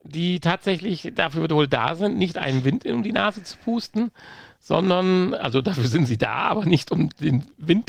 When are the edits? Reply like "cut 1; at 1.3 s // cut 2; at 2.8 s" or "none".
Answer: none